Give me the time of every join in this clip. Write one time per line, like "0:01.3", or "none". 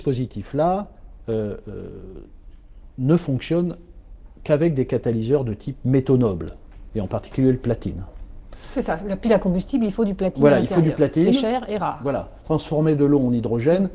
0:12.4